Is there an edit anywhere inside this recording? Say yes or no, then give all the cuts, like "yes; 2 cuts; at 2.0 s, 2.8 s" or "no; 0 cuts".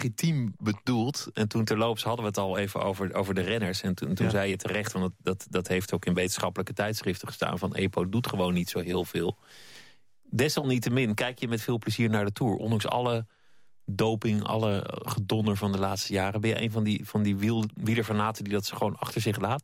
no; 0 cuts